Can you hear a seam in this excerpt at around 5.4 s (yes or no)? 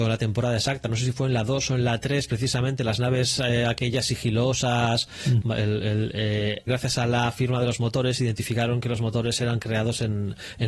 yes